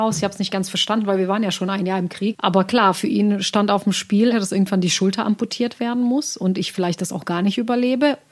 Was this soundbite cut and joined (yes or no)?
yes